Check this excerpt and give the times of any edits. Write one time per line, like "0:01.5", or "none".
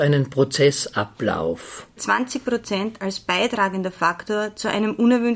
0:02.0